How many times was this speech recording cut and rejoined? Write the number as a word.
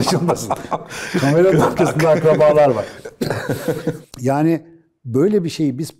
one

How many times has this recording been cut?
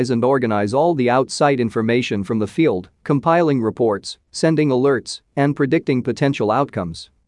zero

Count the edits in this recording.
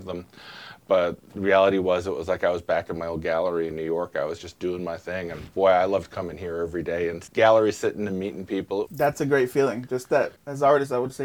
one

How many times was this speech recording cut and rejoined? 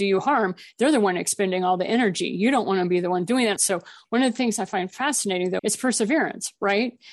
two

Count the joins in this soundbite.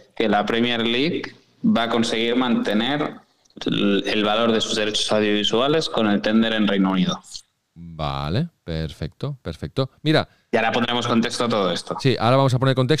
zero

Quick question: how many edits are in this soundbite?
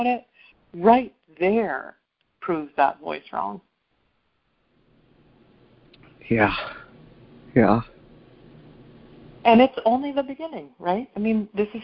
zero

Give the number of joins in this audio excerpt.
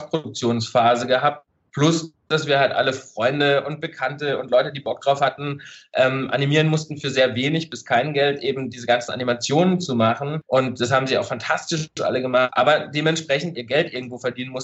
two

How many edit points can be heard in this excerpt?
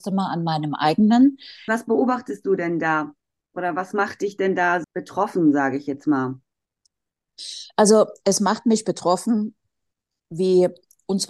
two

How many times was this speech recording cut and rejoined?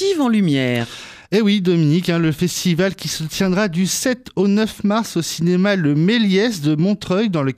zero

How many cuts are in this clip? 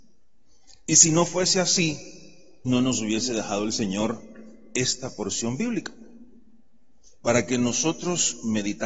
one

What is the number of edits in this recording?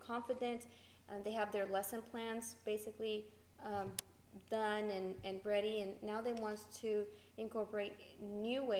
zero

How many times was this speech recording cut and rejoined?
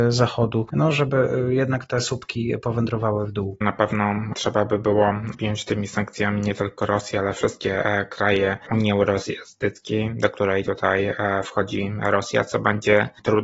one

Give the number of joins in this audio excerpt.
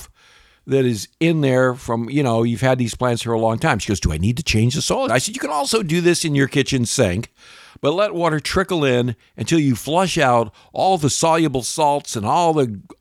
one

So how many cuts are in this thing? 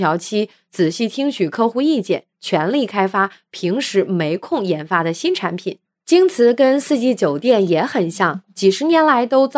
zero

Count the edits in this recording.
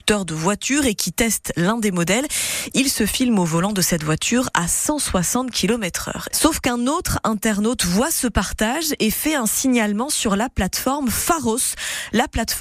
one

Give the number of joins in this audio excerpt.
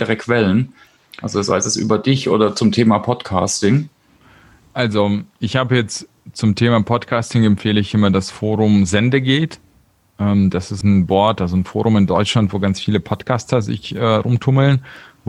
one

